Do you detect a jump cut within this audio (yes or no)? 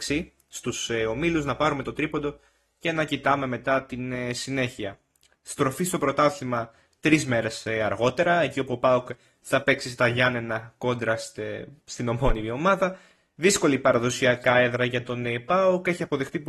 no